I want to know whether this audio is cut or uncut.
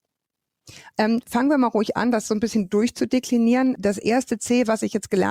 cut